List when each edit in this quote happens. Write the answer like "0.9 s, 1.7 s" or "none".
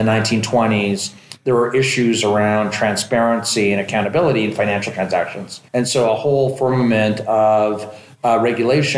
5.7 s